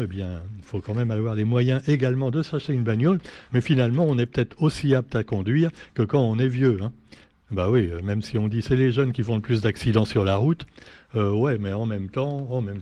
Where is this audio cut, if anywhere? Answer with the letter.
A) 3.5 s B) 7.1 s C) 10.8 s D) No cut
D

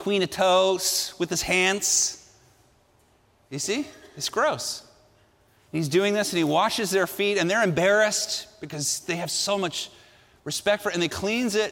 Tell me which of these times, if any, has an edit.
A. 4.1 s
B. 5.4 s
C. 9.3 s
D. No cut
D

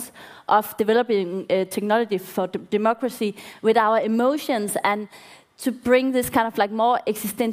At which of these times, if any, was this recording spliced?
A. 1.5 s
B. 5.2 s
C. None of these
C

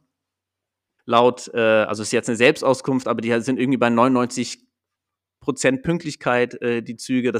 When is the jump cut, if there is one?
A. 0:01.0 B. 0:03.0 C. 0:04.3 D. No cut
A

